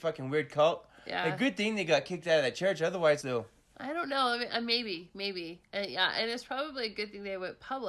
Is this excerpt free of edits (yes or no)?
no